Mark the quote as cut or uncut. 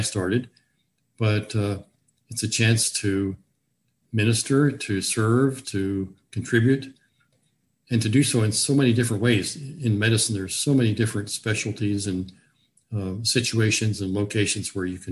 cut